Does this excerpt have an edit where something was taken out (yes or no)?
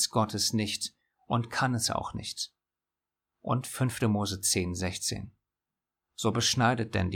no